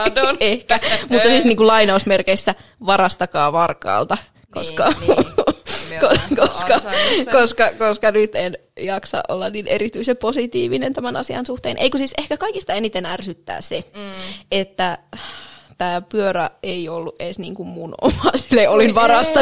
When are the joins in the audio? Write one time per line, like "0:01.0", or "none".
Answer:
none

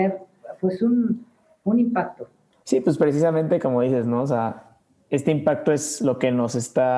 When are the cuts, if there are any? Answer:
none

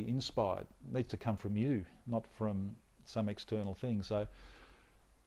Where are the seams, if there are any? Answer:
none

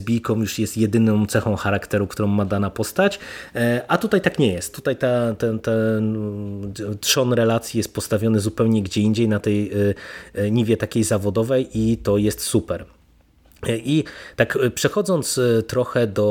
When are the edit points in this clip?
none

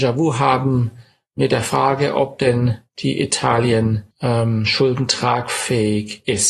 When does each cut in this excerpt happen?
0:04.1

